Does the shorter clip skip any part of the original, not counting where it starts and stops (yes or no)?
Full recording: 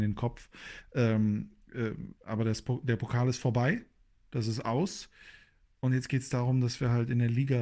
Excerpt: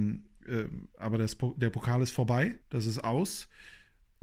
yes